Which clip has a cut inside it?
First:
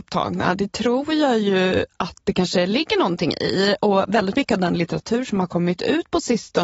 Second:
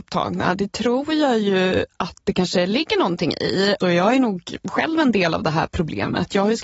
second; 1 cut; at 3.8 s

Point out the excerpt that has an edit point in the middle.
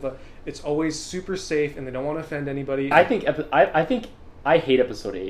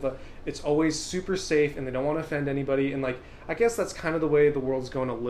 first; 1 cut; at 2.9 s

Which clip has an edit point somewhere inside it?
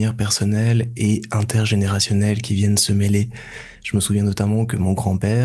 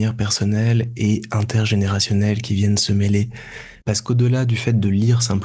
second; 1 cut; at 3.8 s

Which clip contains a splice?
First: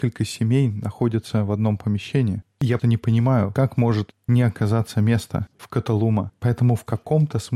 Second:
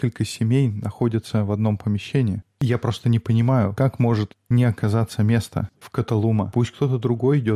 first; 2 cuts; at 2.8 s, 6.3 s

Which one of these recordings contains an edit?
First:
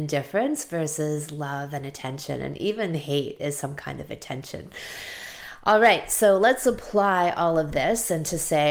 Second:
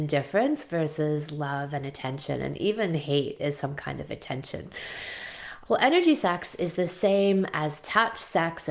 second; 1 cut; at 5.7 s

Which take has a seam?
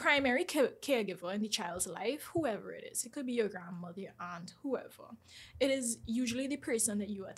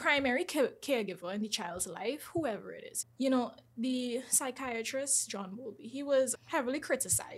second; 2 cuts; at 3.0 s, 6.4 s

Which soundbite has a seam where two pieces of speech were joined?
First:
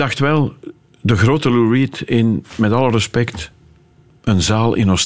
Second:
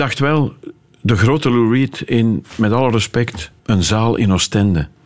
second; 1 cut; at 3.6 s

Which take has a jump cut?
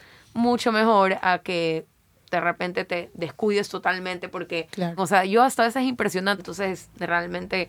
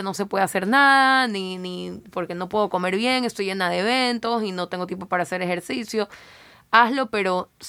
first; 2 cuts; at 5.0 s, 6.4 s

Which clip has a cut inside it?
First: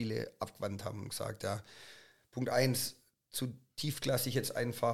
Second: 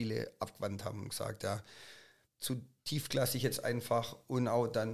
second; 1 cut; at 2.2 s

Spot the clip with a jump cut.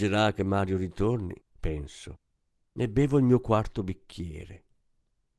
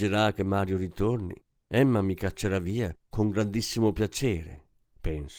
first; 1 cut; at 1.4 s

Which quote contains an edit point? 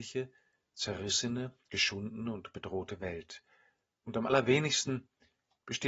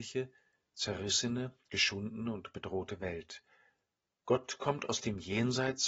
first; 1 cut; at 4.0 s

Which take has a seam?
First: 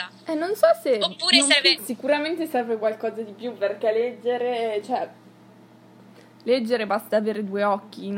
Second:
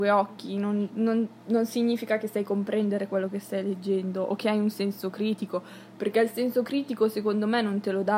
first; 1 cut; at 1.8 s

